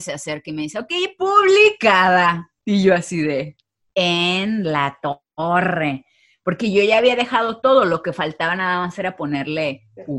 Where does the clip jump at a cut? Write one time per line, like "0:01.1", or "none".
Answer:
0:02.6